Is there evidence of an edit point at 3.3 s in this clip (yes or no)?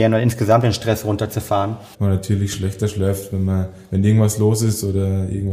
no